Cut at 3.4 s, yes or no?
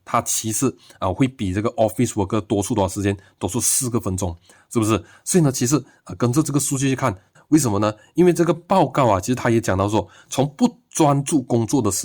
no